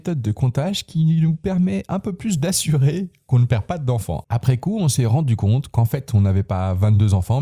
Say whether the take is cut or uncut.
cut